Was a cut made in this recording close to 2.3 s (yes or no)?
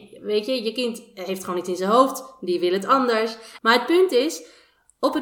no